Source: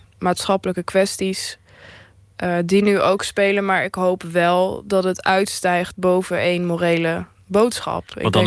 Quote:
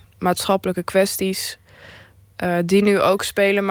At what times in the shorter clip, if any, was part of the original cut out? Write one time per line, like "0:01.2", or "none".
none

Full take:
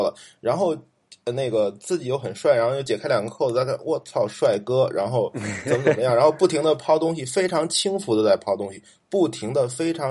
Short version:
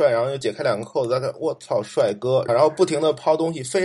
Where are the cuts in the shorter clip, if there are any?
0:02.5

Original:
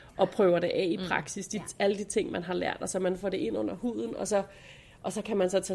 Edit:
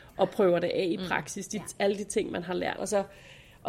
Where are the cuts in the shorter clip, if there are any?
0:02.8

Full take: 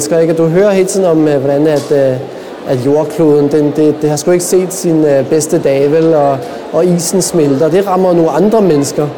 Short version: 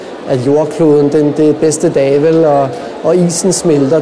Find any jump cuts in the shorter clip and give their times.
0:01.6

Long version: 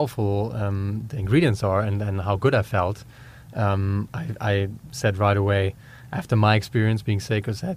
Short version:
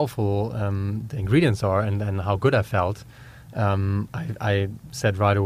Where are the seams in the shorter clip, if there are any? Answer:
none

